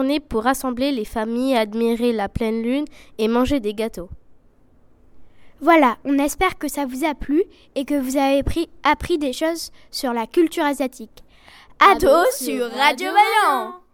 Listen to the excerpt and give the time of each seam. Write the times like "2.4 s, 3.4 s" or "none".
12.0 s